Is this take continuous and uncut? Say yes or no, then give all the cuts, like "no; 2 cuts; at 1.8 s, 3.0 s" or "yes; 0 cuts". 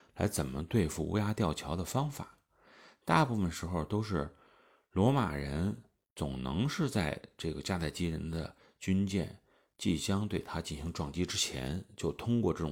yes; 0 cuts